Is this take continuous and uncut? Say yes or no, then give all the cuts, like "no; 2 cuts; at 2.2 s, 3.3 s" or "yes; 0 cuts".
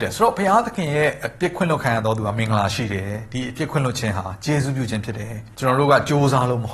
no; 1 cut; at 5.5 s